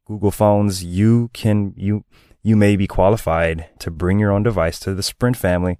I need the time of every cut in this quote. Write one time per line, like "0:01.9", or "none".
0:03.8